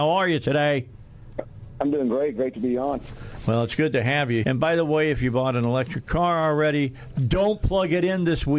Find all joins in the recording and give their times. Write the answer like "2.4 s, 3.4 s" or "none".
4.4 s